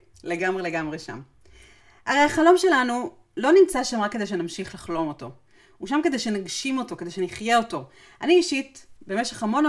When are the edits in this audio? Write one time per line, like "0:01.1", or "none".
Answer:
none